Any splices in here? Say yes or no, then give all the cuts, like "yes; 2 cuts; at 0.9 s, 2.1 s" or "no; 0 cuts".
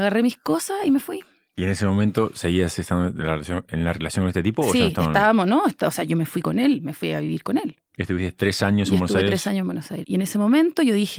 yes; 1 cut; at 10.0 s